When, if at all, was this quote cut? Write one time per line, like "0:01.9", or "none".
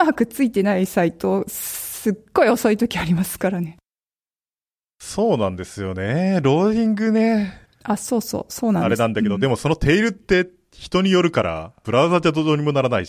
0:07.7